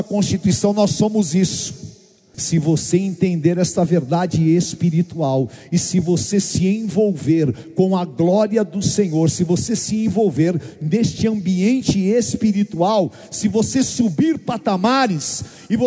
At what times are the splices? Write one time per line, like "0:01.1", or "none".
0:02.3